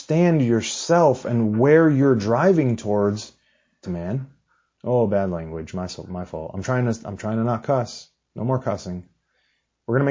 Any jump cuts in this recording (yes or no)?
yes